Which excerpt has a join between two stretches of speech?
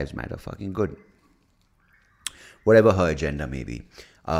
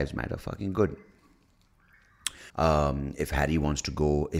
second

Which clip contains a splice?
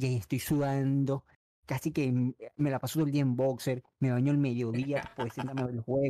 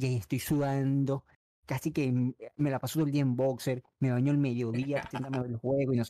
second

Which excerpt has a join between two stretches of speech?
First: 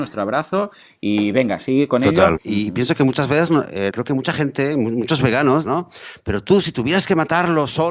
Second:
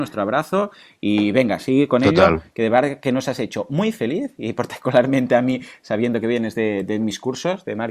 first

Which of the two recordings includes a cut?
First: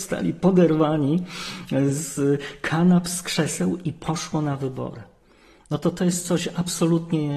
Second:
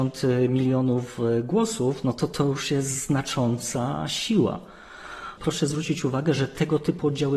second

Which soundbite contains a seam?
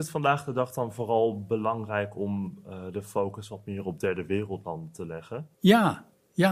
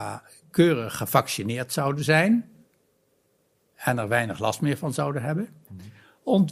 first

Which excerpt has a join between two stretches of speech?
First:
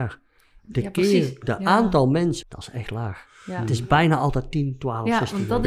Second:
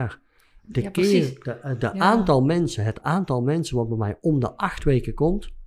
first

